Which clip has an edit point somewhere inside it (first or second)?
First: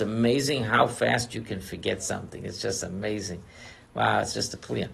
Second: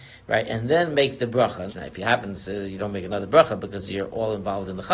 second